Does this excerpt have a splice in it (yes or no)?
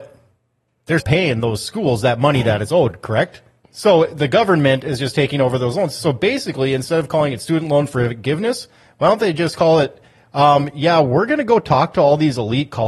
yes